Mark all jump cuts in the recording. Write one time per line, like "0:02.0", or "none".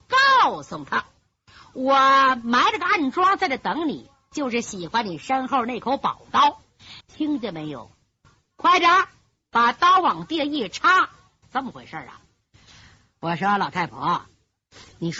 0:07.0
0:11.4

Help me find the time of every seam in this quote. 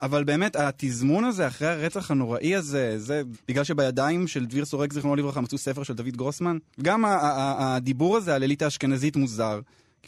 0:03.3
0:06.7

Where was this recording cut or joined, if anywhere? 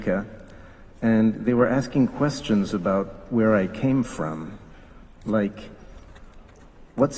none

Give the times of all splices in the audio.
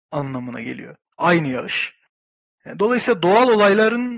none

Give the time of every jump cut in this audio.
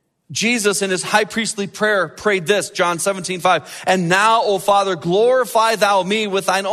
none

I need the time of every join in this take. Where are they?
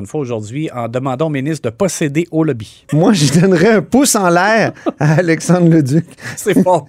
0:02.9

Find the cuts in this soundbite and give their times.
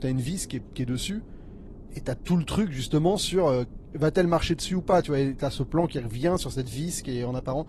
none

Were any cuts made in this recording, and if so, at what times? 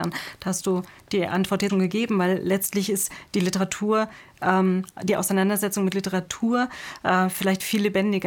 0:01.7

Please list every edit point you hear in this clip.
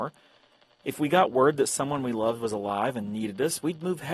none

